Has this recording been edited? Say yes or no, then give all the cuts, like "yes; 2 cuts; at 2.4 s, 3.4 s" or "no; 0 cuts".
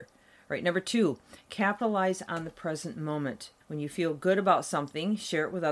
yes; 1 cut; at 3.6 s